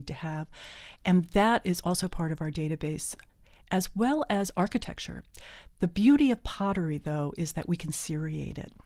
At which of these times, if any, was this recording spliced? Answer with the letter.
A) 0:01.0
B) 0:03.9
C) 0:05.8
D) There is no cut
D